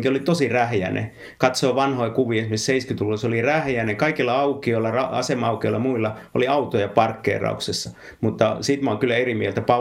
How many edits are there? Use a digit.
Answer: 0